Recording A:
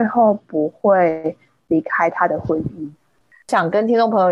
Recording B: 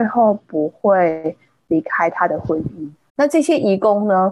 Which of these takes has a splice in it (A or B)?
B